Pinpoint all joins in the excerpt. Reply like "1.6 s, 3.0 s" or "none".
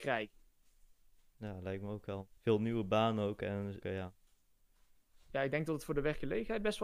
2.4 s, 3.8 s